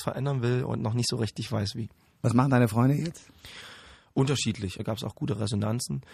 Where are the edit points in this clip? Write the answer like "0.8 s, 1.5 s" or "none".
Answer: 4.8 s